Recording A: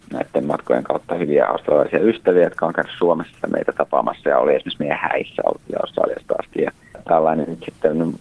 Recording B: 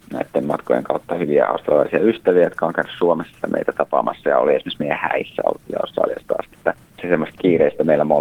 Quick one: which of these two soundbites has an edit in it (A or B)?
B